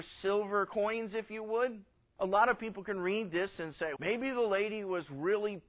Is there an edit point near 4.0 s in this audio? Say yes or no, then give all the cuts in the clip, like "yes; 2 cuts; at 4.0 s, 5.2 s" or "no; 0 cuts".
yes; 2 cuts; at 2.2 s, 4.0 s